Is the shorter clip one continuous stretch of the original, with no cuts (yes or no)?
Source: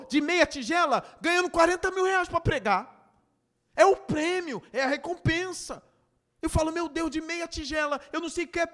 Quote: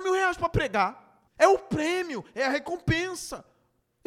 no